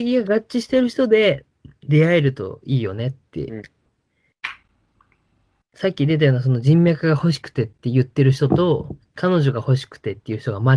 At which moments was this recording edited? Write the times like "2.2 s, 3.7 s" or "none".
3.9 s

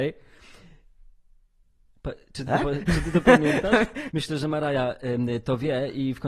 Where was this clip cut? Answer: 4.1 s

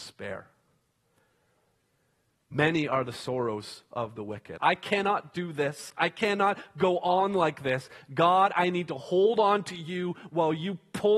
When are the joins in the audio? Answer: 4.6 s

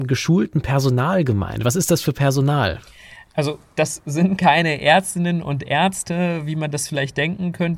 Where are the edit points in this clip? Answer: none

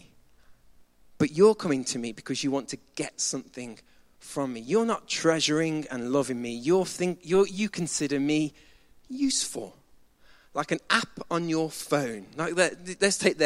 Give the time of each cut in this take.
none

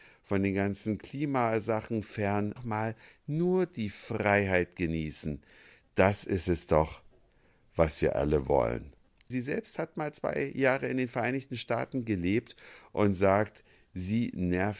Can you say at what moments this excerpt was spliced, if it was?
2.6 s, 9.3 s

